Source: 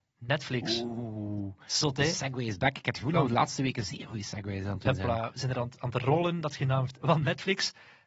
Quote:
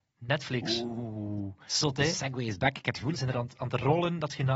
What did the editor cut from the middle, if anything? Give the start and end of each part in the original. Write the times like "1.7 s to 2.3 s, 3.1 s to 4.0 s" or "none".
3.1 s to 5.3 s